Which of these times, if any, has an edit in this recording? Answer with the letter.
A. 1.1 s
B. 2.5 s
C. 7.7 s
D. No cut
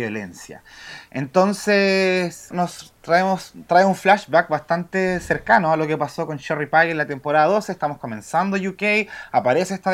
B